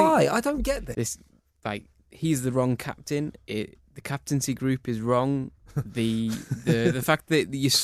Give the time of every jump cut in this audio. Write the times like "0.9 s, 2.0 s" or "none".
0.9 s

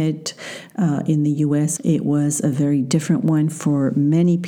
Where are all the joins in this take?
1.8 s

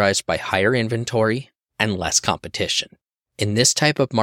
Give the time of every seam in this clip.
1.7 s

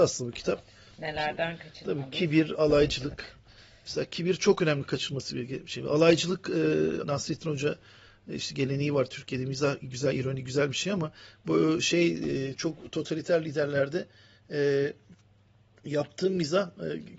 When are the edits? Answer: 7.0 s

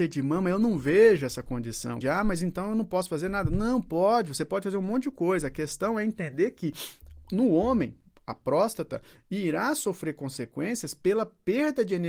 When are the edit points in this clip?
2.0 s

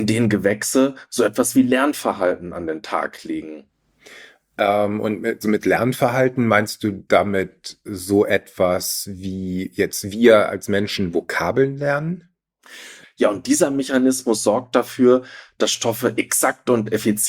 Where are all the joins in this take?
5.4 s, 13.0 s

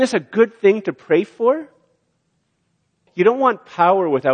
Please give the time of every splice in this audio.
3.1 s

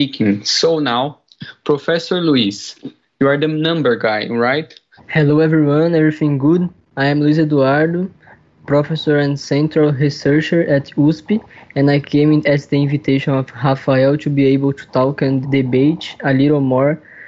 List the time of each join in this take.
5.0 s, 15.4 s

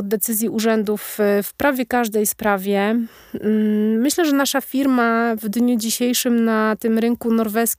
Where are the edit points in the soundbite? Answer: none

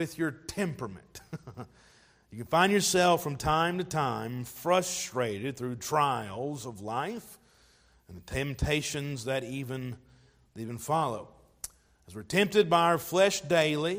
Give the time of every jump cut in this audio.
none

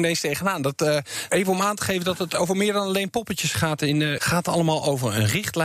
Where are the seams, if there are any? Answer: 1.3 s, 4.2 s

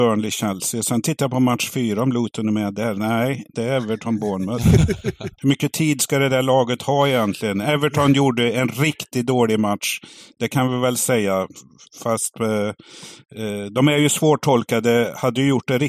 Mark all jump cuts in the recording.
none

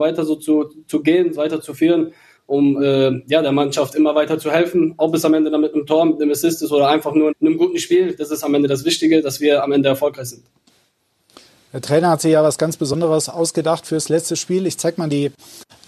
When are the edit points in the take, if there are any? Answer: 7.3 s

